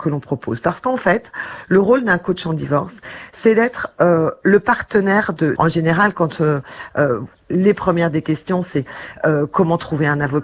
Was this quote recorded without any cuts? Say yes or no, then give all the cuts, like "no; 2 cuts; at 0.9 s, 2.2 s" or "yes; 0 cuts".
no; 2 cuts; at 5.5 s, 7.3 s